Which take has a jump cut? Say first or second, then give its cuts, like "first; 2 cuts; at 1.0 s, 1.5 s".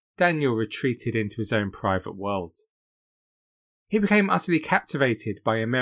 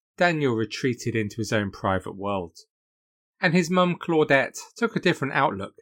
second; 1 cut; at 3.2 s